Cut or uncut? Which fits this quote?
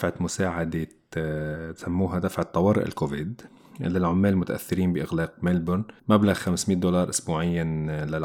cut